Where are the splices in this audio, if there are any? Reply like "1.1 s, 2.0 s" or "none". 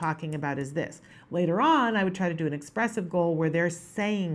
none